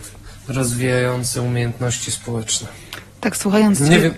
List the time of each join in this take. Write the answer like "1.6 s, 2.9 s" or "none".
none